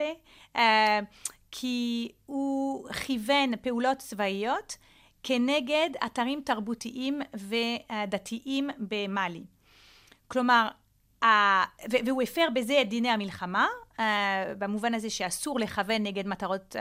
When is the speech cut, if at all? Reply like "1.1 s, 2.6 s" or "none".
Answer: none